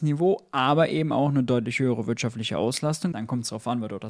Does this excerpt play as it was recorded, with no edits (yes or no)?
no